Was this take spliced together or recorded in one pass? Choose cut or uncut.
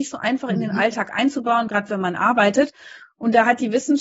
uncut